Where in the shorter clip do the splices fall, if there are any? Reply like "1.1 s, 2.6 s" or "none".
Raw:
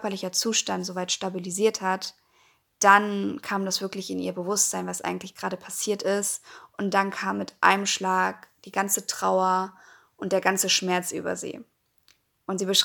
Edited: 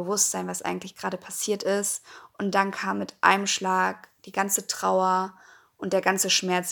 none